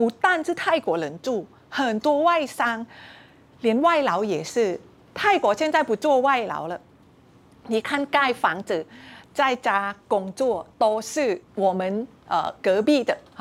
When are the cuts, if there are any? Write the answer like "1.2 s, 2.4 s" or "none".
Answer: 11.4 s

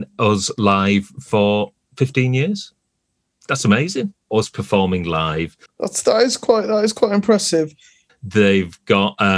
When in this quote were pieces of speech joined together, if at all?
4.3 s, 5.7 s, 8.1 s

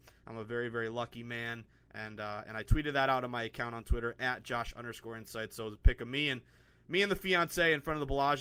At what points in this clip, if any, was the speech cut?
none

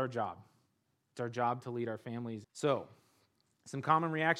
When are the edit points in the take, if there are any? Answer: 2.4 s

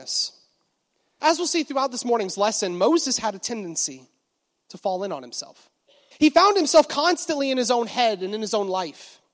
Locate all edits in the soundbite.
1.2 s, 6.1 s

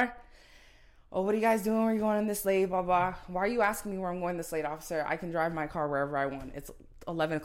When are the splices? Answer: none

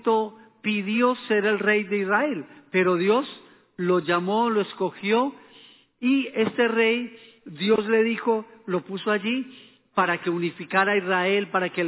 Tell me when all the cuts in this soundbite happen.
none

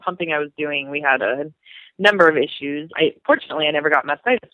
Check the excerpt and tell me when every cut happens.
2.9 s

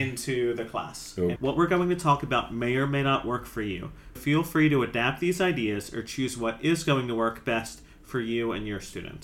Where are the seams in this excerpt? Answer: 1.4 s, 4.2 s

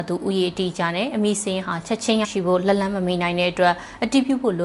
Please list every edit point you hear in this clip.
2.2 s

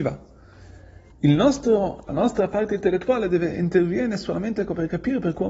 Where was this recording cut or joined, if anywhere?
1.1 s

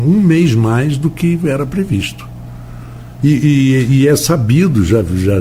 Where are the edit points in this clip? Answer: 3.2 s

